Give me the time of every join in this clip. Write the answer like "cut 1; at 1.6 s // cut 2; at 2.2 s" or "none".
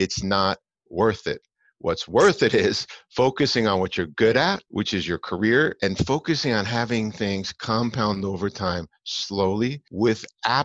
none